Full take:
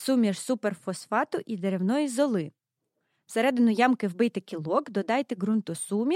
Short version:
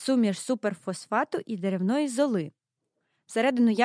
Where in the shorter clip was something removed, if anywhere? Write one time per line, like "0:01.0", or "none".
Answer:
none